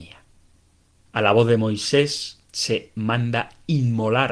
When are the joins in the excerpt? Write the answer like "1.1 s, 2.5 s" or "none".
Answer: 1.1 s, 2.5 s